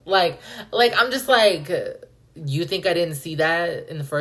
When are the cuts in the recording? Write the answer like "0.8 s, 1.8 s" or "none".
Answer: none